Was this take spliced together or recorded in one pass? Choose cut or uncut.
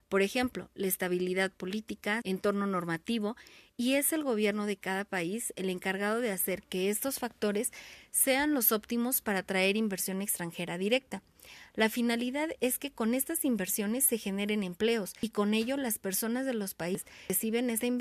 cut